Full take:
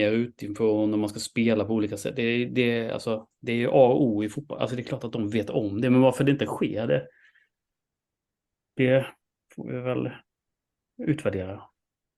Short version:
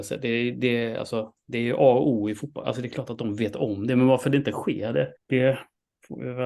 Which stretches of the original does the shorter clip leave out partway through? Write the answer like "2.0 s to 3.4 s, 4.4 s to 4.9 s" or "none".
7.1 s to 8.6 s